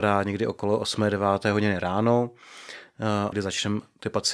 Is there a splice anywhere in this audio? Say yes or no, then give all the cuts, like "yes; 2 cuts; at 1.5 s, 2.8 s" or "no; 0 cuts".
yes; 1 cut; at 3.3 s